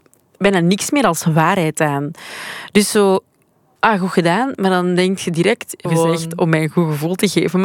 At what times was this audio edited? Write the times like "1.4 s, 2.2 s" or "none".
3.8 s, 5.9 s